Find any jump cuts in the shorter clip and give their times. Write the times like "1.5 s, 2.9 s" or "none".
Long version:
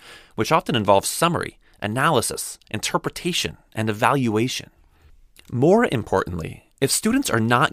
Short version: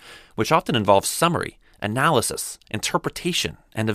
none